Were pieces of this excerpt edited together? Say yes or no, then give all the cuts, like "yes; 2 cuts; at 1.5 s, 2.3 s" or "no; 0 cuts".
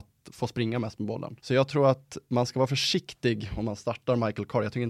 yes; 1 cut; at 1.4 s